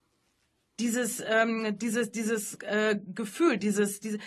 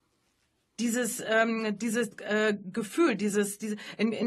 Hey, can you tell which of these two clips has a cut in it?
second; 1 cut; at 2.1 s

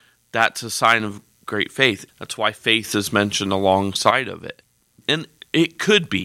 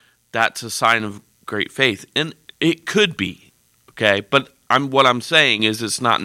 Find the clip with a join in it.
first; 2 cuts; at 2.1 s, 5.0 s

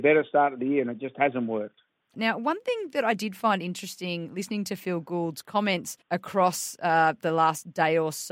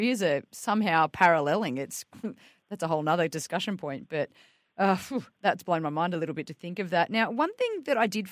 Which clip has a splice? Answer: first; 2 cuts; at 2.1 s, 6.0 s

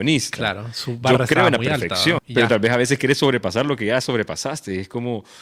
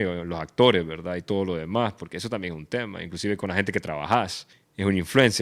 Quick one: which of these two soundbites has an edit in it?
first; 1 cut; at 2.2 s

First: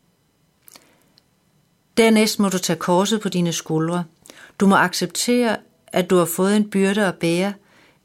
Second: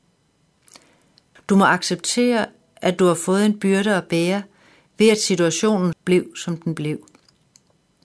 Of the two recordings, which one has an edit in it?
second; 2 cuts; at 1.4 s, 5.9 s

